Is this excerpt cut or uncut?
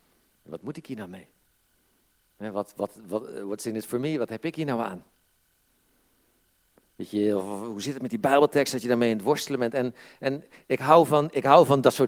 uncut